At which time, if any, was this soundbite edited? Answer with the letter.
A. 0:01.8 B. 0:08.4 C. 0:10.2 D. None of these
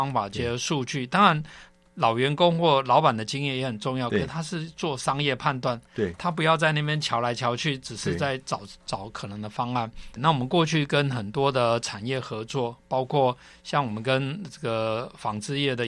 C